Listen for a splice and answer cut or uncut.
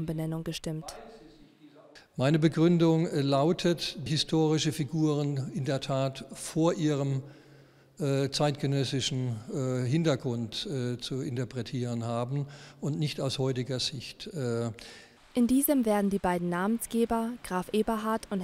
cut